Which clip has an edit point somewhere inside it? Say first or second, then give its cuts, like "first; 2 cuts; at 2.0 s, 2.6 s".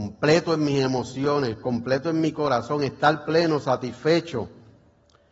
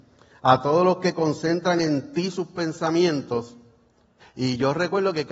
second; 1 cut; at 4.2 s